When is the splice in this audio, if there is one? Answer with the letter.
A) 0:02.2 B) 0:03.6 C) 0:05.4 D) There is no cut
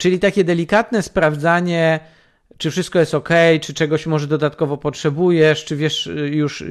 D